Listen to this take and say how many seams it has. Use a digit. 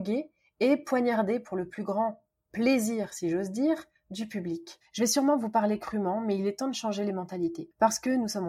1